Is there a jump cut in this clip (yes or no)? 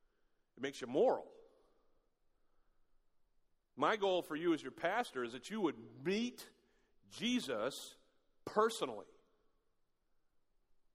no